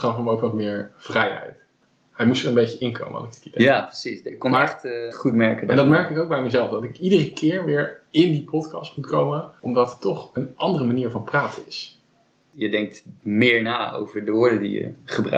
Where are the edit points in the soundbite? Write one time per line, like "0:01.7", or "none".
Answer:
0:05.1